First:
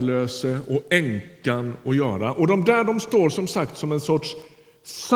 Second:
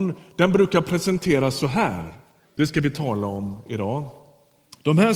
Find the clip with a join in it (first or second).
second